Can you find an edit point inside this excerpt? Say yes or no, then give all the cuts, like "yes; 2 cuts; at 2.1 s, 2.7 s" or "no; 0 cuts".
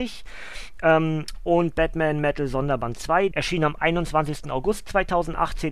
yes; 1 cut; at 3.3 s